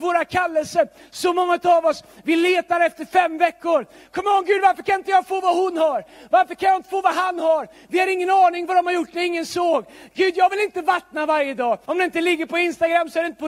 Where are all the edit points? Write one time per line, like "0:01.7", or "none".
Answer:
0:11.9

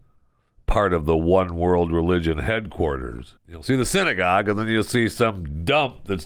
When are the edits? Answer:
0:03.4

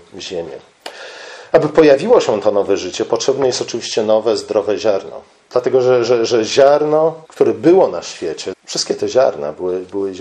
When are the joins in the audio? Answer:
0:07.2
0:08.5

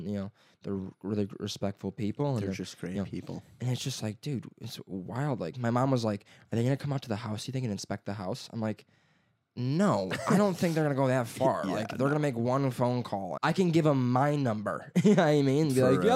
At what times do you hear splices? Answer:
0:13.4

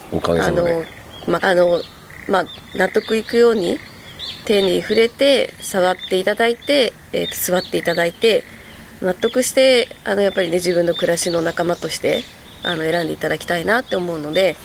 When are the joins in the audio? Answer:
0:01.4

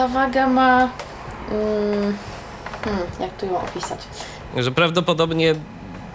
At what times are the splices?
0:04.5

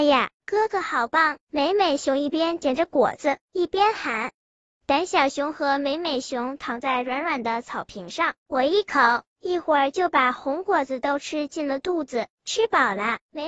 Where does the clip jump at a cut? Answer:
0:08.4
0:12.3

